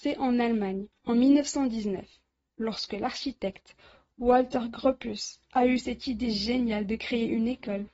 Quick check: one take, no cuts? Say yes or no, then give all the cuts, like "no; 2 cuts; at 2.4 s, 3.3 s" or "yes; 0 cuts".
yes; 0 cuts